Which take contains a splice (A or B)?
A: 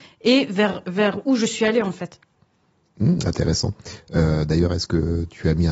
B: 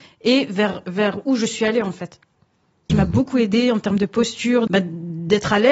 B